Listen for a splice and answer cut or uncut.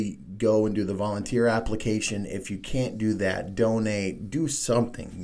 uncut